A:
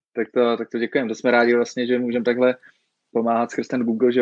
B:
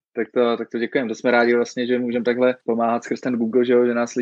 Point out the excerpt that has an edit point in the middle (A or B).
B